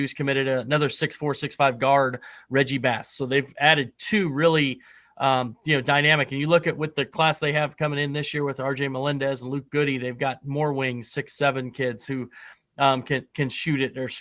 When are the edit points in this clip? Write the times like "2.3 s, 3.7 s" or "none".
none

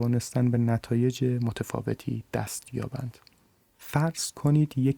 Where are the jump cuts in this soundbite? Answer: 3.7 s

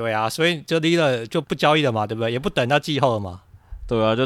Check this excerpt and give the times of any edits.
1.4 s

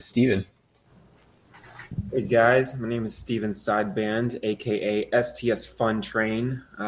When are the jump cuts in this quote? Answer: none

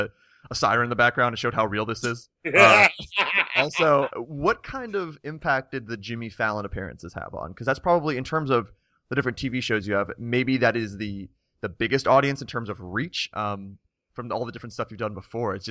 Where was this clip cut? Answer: 4.1 s, 13.3 s

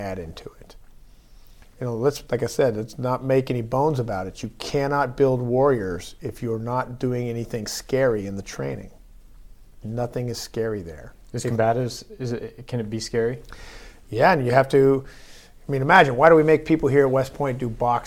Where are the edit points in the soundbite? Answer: 2.3 s, 9.8 s

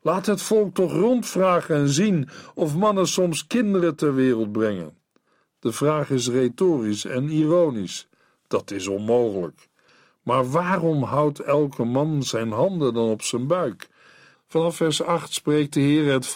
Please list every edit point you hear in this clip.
14.3 s

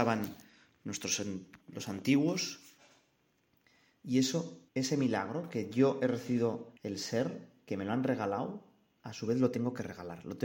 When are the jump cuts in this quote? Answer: 4.7 s, 6.8 s

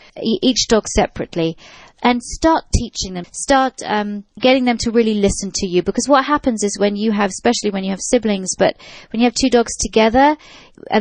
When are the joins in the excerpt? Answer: 3.2 s

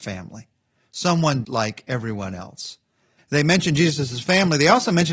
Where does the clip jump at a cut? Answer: 1.4 s, 3.2 s

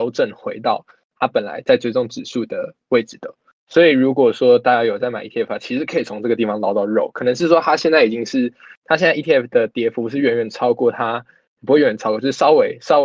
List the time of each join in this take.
none

